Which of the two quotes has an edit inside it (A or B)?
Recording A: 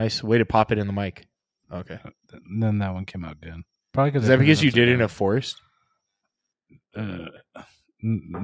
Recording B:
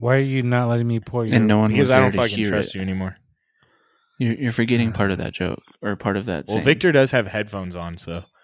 A